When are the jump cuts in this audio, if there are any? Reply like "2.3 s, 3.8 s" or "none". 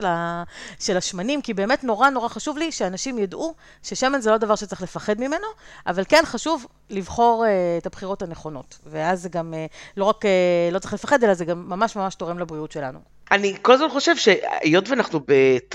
none